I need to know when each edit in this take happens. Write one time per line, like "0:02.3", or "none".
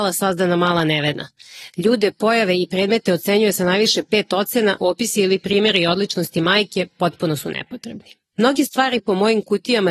0:04.8
0:08.3